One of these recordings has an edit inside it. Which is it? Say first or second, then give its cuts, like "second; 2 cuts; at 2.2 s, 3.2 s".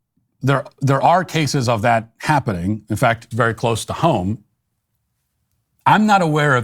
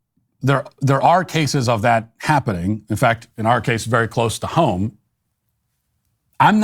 first; 1 cut; at 3.3 s